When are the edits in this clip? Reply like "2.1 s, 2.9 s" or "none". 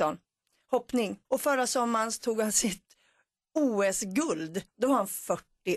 1.2 s

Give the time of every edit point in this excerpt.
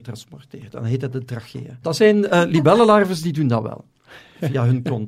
1.8 s

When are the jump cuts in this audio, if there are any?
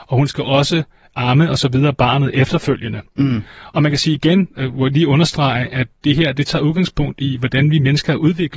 none

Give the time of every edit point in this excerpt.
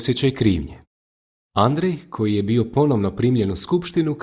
1.5 s

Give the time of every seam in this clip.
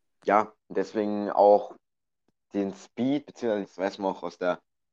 3.6 s

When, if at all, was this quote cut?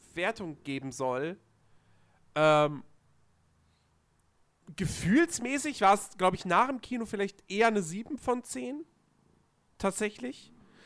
none

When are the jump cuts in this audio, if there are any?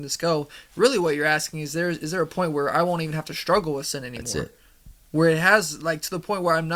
none

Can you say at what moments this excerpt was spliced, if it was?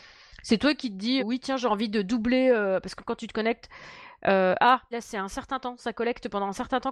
1.2 s, 4.9 s

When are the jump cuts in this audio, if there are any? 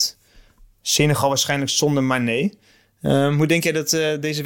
none

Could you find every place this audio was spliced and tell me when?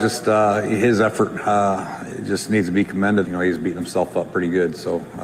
3.2 s

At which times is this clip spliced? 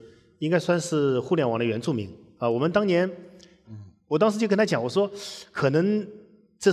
3.6 s

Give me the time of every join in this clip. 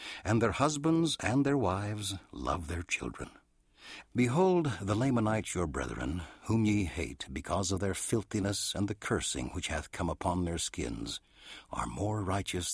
4.0 s

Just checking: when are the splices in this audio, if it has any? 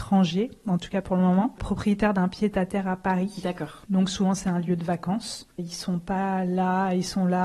5.6 s

